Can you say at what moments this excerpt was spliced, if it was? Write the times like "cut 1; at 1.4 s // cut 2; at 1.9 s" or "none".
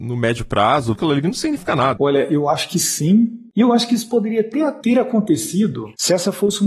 cut 1; at 0.9 s // cut 2; at 2.0 s